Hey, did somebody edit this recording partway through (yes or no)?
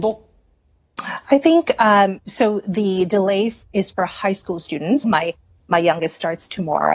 yes